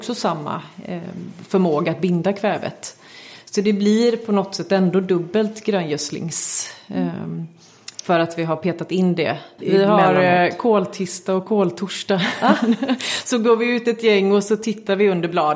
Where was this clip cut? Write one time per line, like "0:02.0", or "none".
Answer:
0:09.6